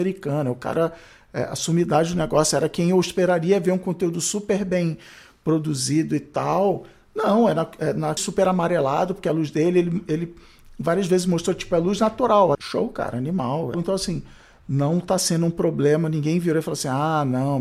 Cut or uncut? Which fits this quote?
cut